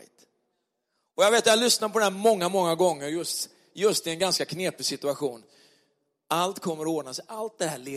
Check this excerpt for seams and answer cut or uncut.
uncut